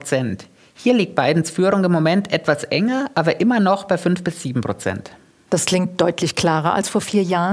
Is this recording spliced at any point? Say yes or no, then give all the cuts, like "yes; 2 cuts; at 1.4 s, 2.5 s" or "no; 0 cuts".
no; 0 cuts